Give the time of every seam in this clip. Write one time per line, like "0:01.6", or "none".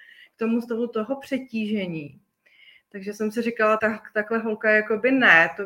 0:03.8